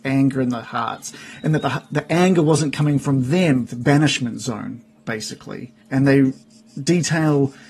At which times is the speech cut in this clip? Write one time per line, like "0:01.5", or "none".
0:03.6
0:05.8